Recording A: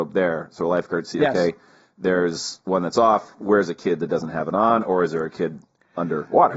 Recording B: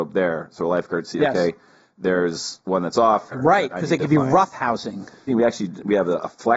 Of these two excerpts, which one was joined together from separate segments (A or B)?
B